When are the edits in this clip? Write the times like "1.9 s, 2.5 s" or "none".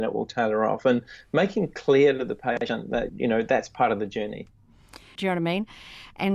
3.1 s, 5.2 s